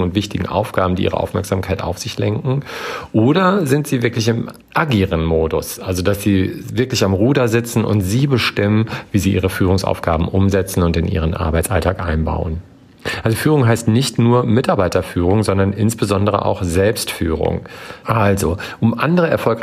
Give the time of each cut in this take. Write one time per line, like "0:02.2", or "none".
0:04.6
0:18.0